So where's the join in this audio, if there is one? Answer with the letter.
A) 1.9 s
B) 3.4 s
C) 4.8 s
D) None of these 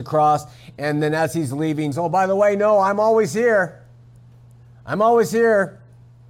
A